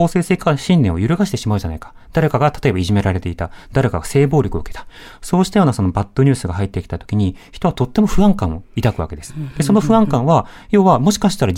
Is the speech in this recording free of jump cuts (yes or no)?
yes